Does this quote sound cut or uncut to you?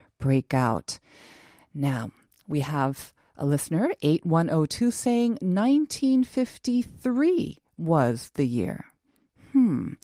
uncut